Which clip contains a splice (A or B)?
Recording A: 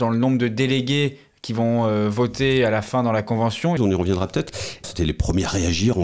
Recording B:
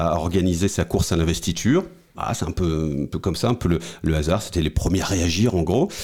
A